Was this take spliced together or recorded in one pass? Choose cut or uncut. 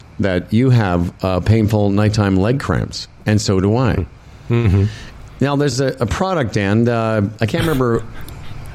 uncut